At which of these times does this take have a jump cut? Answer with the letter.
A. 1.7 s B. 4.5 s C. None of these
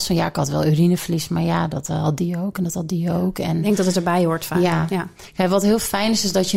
C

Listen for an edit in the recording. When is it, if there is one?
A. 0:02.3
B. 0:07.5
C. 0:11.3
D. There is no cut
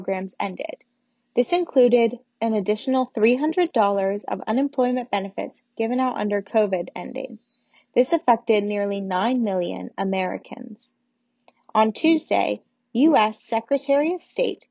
A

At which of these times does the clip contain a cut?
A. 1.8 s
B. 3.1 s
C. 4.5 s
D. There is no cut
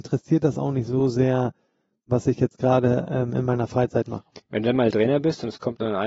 D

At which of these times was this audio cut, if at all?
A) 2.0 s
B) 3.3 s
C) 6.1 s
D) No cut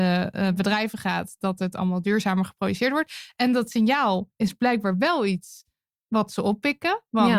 D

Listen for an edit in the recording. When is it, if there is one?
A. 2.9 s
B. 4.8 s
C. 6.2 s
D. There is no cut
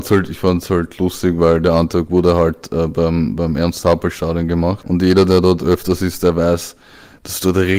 B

